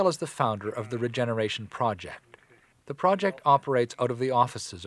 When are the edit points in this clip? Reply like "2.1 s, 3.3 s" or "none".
2.7 s

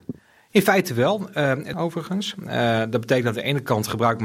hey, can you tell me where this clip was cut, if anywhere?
1.7 s

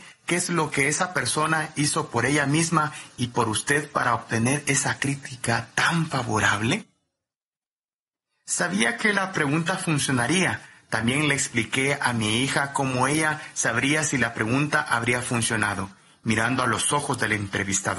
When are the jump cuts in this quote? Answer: none

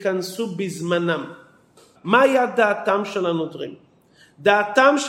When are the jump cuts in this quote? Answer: 2.0 s

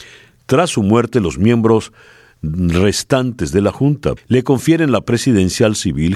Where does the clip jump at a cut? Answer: 4.2 s

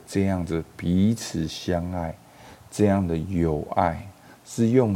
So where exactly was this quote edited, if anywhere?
none

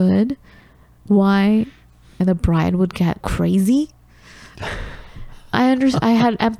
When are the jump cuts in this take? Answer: 3.2 s

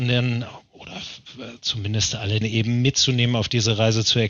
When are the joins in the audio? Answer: 2.4 s

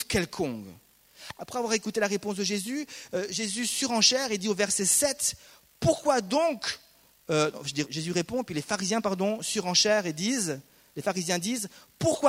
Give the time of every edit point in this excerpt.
7.9 s

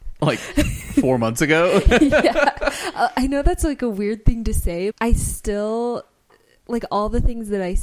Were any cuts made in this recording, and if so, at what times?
4.9 s

